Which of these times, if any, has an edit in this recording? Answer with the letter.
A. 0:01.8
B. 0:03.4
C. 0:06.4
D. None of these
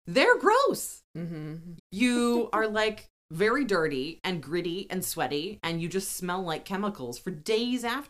A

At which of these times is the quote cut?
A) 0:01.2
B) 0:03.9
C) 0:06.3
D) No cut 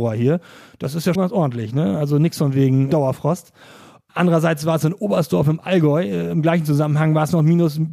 A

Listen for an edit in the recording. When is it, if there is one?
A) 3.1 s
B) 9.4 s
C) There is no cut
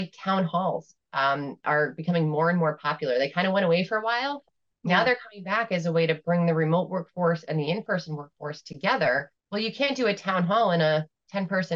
B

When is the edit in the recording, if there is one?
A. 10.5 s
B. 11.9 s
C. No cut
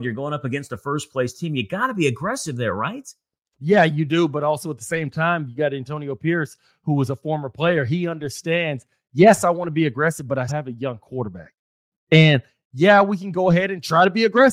A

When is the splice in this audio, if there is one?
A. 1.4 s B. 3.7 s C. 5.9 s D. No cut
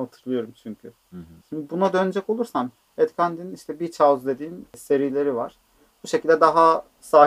A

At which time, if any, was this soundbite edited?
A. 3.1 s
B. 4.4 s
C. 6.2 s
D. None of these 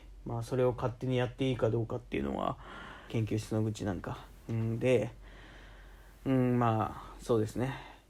A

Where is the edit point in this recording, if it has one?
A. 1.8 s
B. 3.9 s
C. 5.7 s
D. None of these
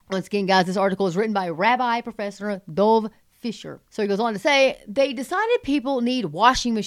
B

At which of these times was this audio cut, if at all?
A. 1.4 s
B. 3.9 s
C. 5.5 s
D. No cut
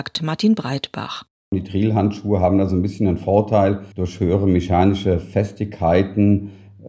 B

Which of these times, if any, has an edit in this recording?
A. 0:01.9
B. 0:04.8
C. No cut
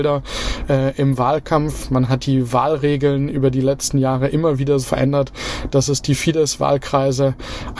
B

